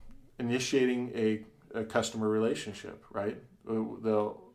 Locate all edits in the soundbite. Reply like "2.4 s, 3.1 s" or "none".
none

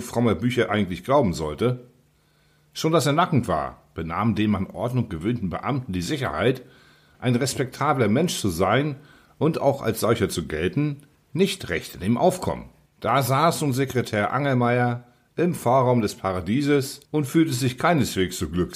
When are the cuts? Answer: 7.1 s, 12.9 s, 17.1 s

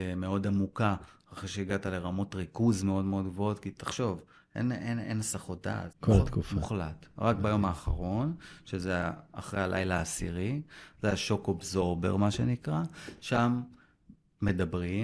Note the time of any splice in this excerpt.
5.9 s

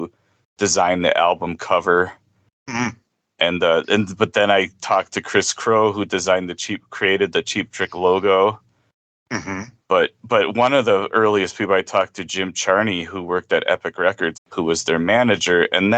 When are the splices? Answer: 14.3 s

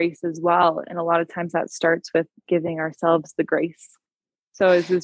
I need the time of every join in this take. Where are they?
none

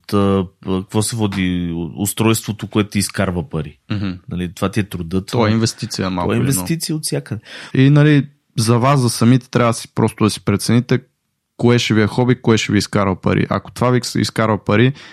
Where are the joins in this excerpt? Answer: 7.7 s

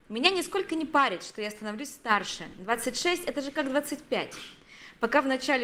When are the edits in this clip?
none

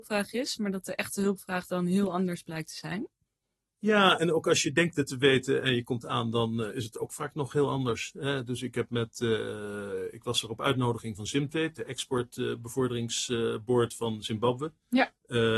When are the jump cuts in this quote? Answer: none

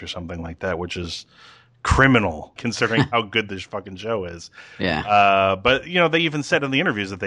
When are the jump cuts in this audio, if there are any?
2.6 s

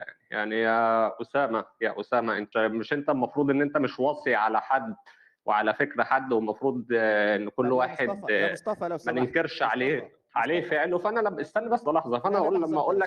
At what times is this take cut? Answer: 2.5 s, 11.9 s

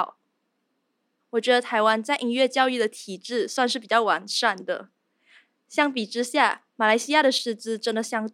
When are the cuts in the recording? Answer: 1.2 s

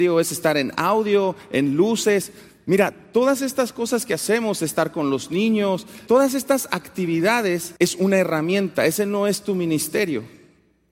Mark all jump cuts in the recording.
6.1 s, 7.8 s

